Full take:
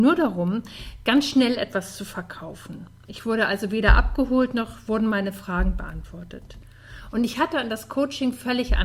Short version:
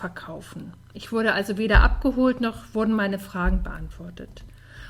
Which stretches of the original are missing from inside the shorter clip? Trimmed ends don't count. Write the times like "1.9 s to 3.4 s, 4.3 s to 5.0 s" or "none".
none